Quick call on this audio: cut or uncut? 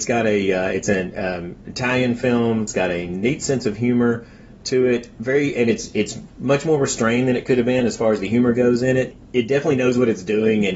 uncut